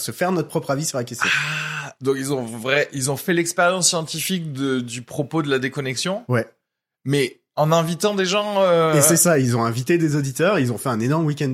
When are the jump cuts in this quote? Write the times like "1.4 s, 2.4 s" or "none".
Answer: none